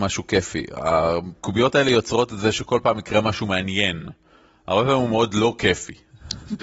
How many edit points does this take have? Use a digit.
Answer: 0